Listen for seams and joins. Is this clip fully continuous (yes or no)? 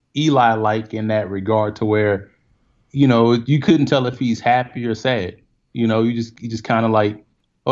yes